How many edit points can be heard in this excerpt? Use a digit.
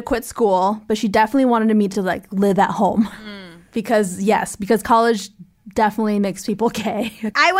0